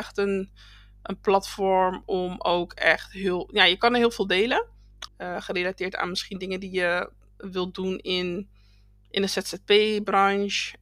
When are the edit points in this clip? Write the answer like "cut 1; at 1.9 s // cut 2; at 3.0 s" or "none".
cut 1; at 5.1 s